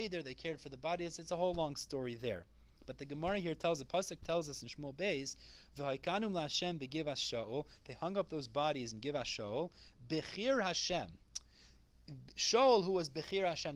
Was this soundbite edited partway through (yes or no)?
no